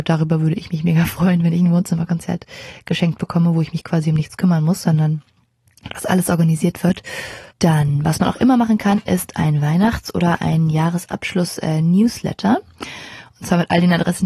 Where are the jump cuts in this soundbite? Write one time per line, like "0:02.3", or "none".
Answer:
0:07.5